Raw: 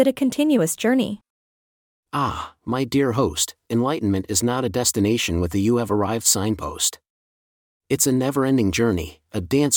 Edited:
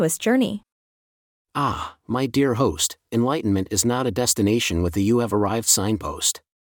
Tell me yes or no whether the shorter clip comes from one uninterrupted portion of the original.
yes